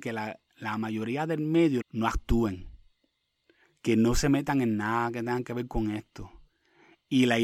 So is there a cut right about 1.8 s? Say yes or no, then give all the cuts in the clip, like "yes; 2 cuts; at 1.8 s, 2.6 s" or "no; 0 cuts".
yes; 1 cut; at 1.8 s